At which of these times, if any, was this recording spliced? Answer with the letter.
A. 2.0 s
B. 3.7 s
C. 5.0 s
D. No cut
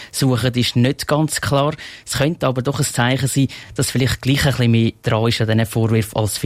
D